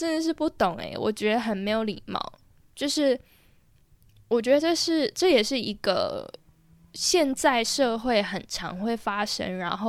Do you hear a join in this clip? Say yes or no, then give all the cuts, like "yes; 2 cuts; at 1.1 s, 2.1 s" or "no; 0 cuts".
no; 0 cuts